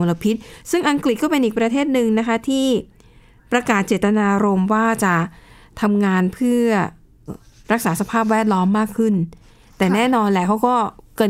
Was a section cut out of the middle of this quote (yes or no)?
yes